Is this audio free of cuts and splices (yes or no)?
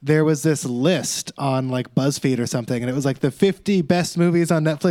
yes